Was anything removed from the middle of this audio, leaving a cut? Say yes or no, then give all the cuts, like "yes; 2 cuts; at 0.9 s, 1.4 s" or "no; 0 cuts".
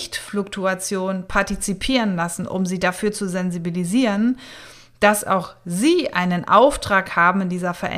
no; 0 cuts